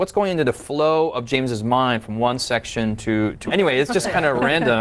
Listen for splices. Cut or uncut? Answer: cut